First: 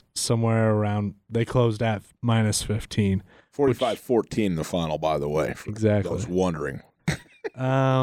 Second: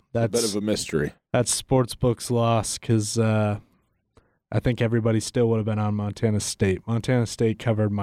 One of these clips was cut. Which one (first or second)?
first